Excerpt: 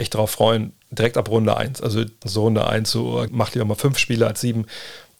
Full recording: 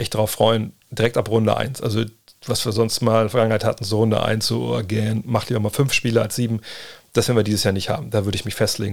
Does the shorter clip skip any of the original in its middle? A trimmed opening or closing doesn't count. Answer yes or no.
yes